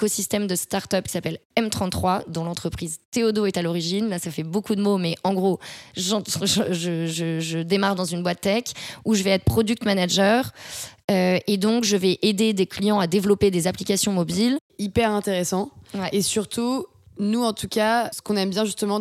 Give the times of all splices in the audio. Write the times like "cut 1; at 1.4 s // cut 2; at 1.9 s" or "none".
cut 1; at 18.1 s